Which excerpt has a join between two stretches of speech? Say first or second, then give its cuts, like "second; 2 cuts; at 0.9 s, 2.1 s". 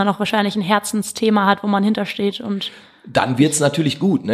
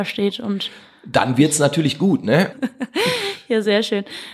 second; 1 cut; at 2.5 s